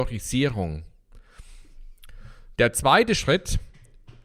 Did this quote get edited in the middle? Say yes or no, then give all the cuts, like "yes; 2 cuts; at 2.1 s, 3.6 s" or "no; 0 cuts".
yes; 1 cut; at 2.5 s